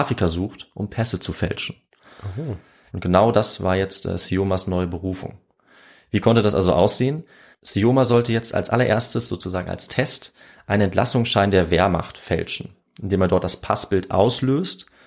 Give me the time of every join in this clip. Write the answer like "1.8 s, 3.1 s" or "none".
2.9 s